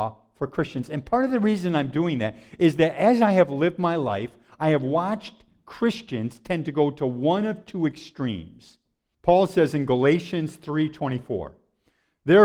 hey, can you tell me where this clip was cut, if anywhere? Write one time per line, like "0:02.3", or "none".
0:09.1